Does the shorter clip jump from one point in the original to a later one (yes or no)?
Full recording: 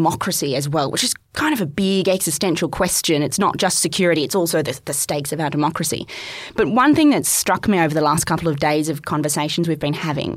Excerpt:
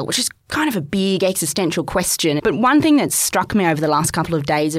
yes